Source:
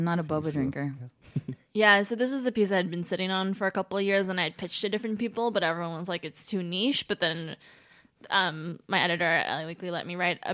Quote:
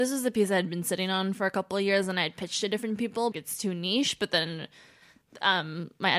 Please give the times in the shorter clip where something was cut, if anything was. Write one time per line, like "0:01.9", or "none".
0:03.3